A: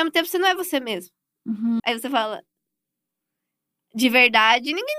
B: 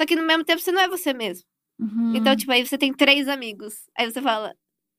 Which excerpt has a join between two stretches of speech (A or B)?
A